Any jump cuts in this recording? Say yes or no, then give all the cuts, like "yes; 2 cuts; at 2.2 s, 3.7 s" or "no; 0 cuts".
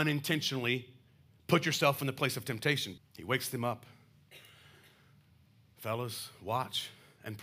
yes; 1 cut; at 3.0 s